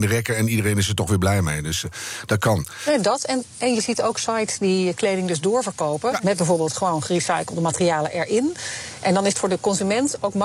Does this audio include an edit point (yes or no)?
yes